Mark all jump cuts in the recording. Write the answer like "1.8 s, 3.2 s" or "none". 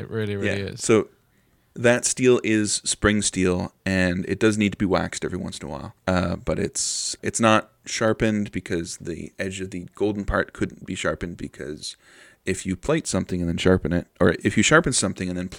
6.0 s, 7.2 s